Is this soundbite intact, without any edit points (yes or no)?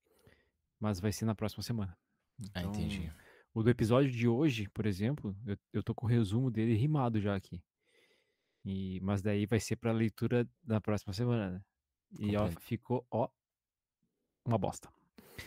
no